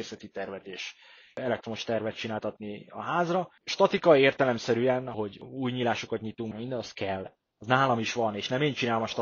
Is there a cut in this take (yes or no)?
yes